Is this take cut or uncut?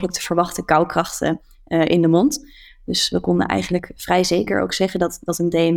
uncut